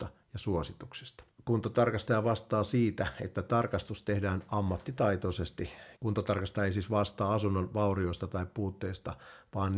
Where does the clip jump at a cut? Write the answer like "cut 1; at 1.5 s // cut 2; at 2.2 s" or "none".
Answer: cut 1; at 5.9 s